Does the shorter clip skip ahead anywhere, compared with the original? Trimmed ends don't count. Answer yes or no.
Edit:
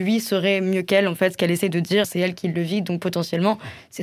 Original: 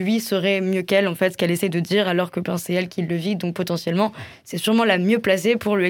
yes